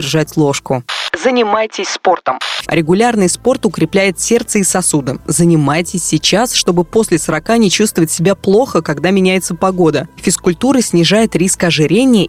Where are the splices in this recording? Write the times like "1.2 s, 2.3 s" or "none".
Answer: 2.6 s